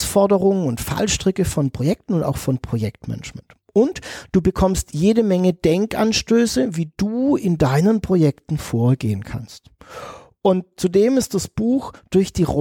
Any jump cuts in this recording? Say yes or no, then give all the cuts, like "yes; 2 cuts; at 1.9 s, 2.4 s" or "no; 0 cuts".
no; 0 cuts